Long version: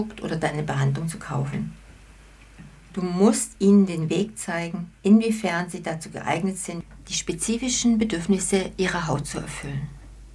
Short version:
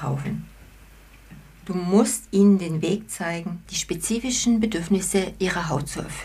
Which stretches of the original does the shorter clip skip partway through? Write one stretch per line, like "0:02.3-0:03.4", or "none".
0:04.9-0:07.0